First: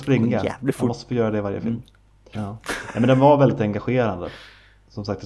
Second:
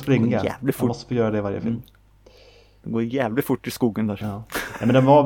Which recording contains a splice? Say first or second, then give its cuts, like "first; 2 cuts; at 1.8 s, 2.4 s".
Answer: first; 1 cut; at 2.3 s